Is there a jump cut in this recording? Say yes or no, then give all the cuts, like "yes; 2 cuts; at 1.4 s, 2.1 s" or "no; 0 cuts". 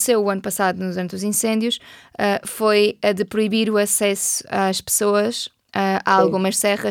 no; 0 cuts